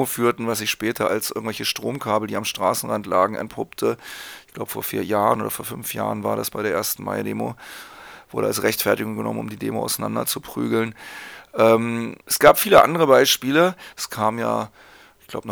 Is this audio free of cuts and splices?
no; 2 cuts; at 12.2 s, 13.9 s

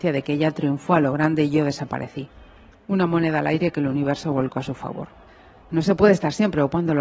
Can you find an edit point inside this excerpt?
no; 0 cuts

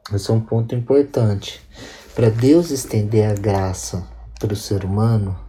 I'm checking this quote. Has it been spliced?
no; 0 cuts

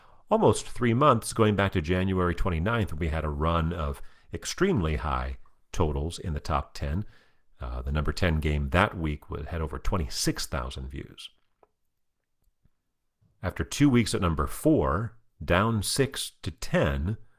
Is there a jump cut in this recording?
yes; 1 cut; at 13.2 s

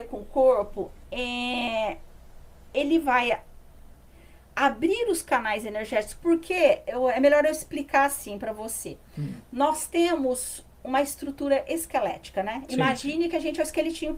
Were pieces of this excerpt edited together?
no; 0 cuts

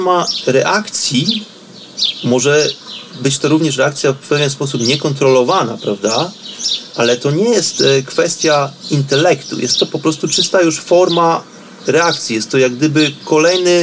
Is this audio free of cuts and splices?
no; 1 cut; at 6.9 s

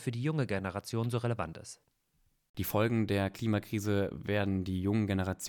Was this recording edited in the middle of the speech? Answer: no; 0 cuts

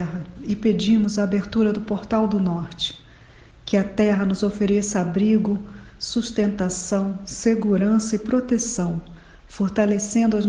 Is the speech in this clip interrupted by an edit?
no; 0 cuts

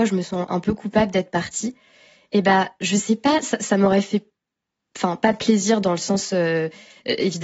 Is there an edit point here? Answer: no; 0 cuts

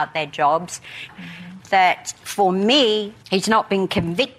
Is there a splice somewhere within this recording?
yes; 1 cut; at 1.1 s

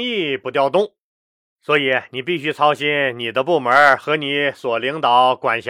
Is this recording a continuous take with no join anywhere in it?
no; 1 cut; at 1.4 s

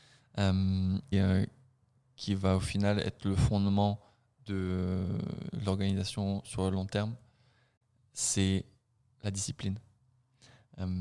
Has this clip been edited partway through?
yes; 1 cut; at 1.1 s

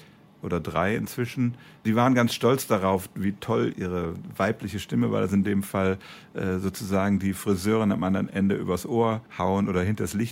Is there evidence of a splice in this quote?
yes; 1 cut; at 9.3 s

